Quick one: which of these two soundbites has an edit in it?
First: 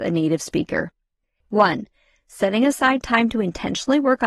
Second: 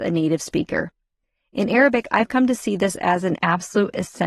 first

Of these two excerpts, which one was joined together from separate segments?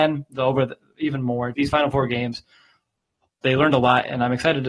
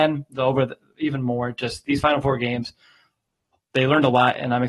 first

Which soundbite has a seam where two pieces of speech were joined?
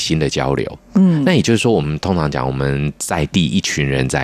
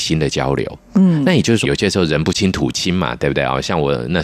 second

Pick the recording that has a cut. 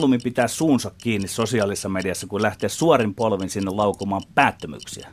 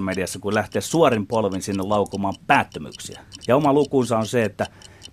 second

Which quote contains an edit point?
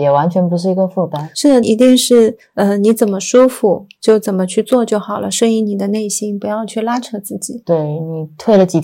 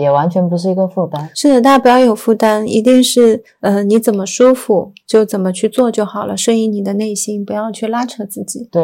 first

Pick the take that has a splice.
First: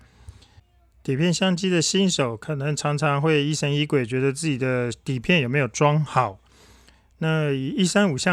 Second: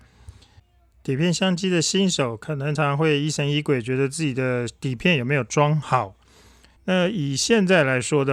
second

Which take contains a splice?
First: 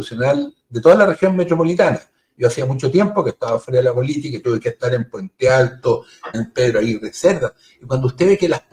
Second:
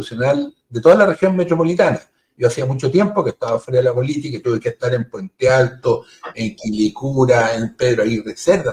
first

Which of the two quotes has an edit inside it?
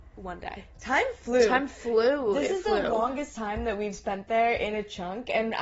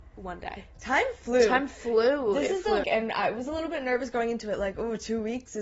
second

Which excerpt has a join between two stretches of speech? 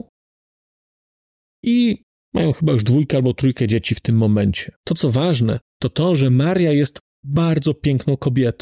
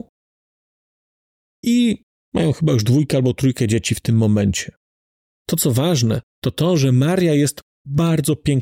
first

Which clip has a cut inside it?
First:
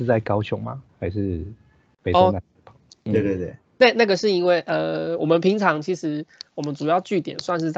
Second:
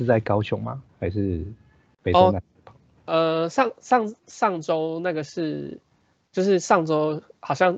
first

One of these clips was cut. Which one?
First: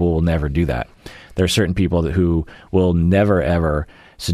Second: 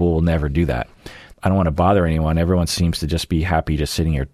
second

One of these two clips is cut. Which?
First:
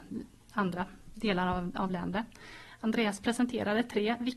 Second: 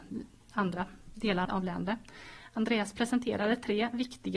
second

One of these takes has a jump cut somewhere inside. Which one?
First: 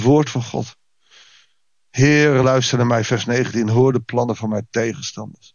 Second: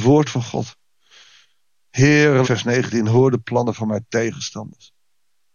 second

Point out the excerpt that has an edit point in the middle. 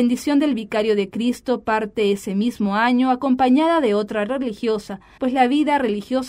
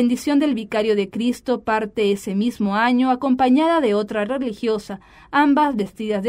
first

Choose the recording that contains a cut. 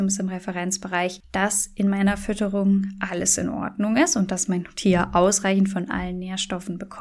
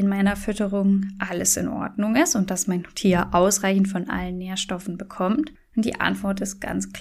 first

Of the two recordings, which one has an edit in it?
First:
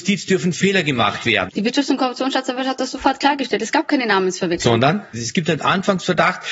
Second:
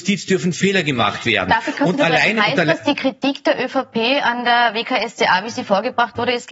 first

